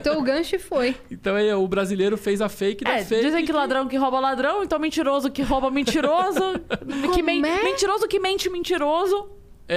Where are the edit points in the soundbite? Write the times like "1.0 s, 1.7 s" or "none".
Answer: none